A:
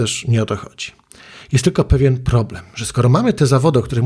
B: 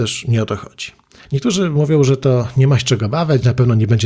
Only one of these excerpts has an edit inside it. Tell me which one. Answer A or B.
B